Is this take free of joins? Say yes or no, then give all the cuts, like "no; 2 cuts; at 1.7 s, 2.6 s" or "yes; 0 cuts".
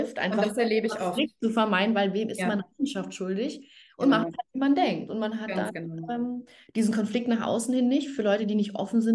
yes; 0 cuts